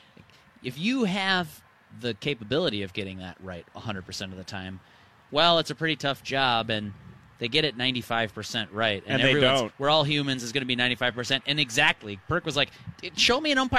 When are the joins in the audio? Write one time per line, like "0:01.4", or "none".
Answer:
0:05.3

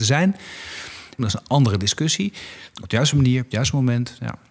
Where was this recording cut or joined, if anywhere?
0:01.2
0:02.8

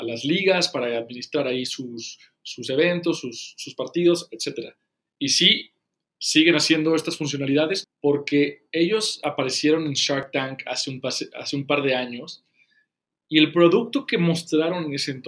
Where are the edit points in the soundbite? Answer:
0:07.8

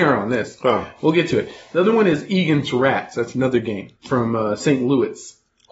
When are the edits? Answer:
0:04.0

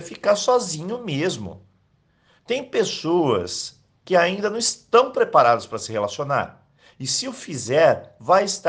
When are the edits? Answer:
none

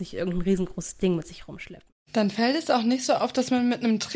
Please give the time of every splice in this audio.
none

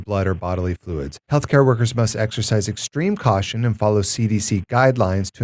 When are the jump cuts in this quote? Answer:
0:01.2

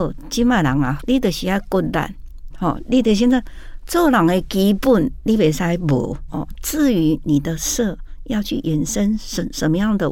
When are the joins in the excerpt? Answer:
0:01.0
0:02.5
0:06.3

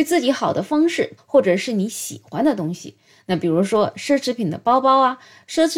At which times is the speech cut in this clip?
0:01.2

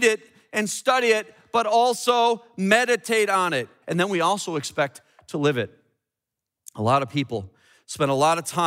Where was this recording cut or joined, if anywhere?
0:03.8

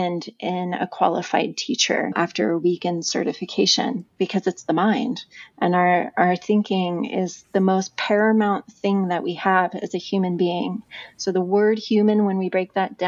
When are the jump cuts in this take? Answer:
0:02.1

